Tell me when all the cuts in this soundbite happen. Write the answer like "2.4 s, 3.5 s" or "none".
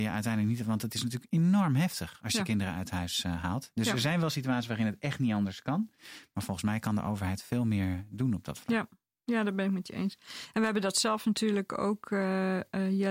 none